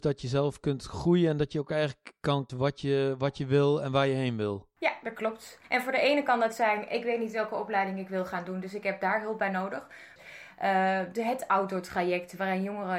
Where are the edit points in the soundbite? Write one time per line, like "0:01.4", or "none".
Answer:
0:02.5
0:10.2

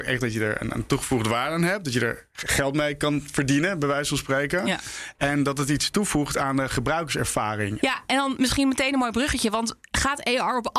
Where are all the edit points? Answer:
0:07.8

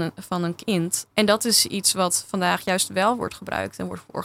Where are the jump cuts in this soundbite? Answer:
0:01.1

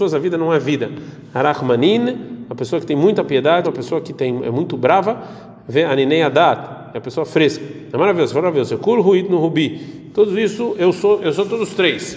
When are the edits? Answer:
0:03.6

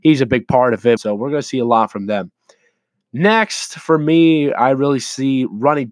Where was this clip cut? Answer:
0:01.0

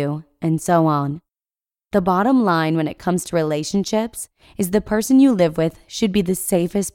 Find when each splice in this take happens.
none

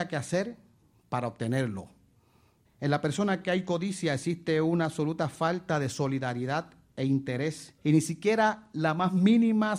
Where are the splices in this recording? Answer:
0:02.6
0:07.8

